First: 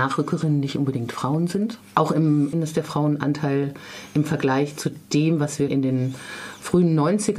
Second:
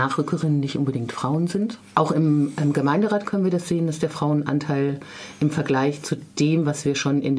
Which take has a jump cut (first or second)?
first